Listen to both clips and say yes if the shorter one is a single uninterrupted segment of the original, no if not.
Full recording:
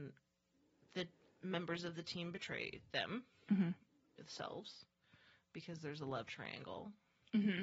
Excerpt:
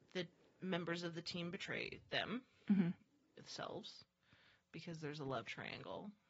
yes